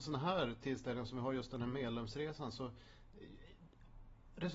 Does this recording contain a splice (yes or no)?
no